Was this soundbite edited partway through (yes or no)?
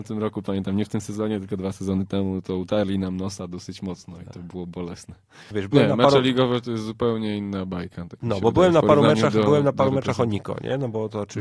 yes